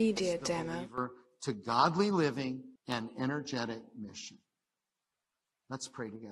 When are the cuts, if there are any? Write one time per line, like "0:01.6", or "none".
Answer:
0:02.8